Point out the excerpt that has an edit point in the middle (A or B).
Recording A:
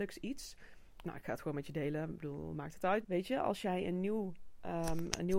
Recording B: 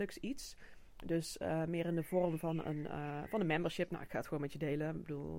A